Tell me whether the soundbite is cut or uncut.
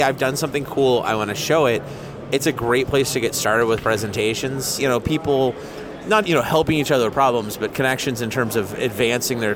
cut